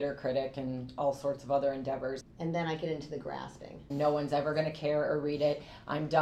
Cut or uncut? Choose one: cut